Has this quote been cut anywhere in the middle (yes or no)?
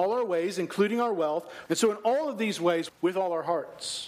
yes